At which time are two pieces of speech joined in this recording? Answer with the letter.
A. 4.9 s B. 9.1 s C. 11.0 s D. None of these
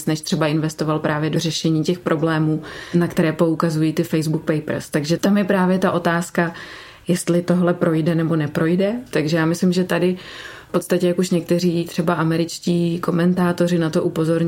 B